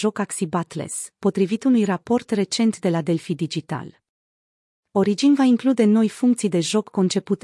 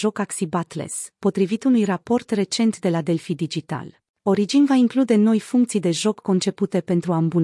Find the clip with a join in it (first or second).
second